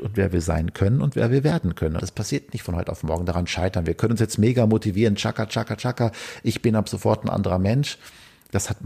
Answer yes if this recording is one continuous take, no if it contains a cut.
no